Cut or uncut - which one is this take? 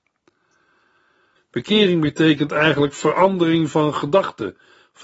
cut